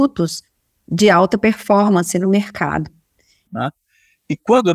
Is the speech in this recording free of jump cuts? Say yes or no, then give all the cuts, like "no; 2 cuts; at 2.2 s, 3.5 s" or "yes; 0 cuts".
no; 1 cut; at 3.5 s